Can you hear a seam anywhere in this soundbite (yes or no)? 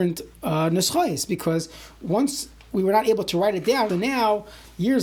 yes